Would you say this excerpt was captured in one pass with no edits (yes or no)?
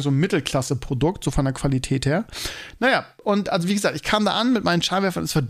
yes